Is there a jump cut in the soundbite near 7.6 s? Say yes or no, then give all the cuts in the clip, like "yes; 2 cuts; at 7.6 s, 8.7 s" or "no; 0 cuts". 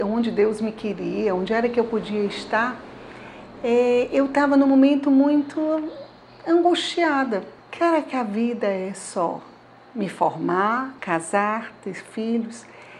yes; 2 cuts; at 7.6 s, 11.0 s